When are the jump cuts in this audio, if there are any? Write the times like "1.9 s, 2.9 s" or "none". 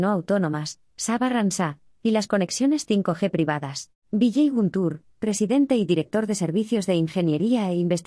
4.0 s

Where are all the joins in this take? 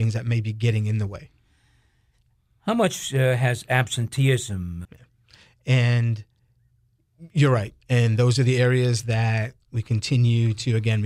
4.8 s

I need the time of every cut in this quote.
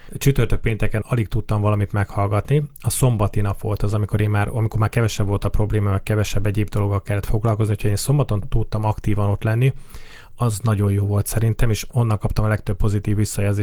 none

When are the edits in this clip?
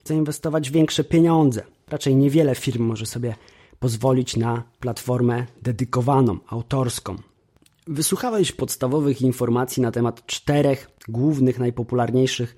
none

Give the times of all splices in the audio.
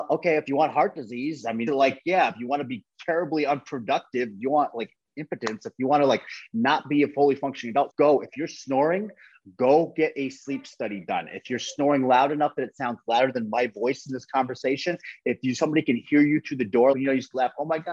1.7 s, 7.9 s, 16.9 s

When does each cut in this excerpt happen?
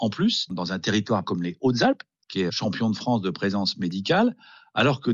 1.2 s, 2.5 s

